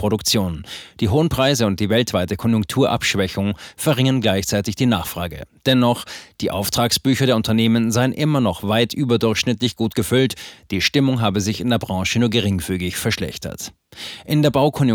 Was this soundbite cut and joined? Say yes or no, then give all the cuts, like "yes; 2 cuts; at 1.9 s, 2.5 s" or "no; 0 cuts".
no; 0 cuts